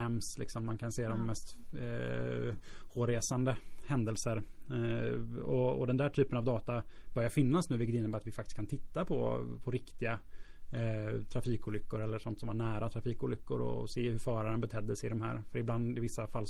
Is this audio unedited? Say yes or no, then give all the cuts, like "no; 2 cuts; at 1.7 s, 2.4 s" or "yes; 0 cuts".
yes; 0 cuts